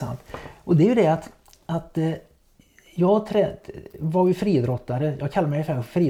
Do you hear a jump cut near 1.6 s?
no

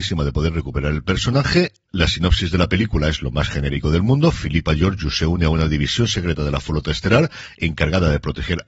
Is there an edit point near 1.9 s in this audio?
yes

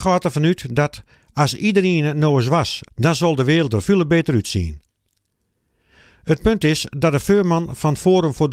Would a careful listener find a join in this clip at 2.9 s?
yes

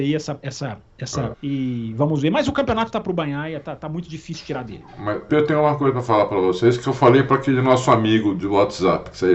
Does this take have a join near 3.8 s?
no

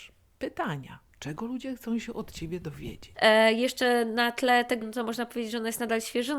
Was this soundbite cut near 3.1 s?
yes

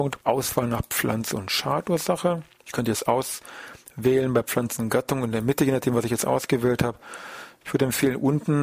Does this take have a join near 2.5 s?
no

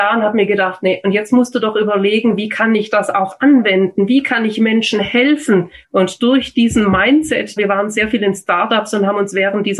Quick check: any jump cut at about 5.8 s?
yes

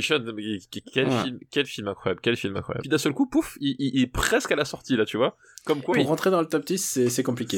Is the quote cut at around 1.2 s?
no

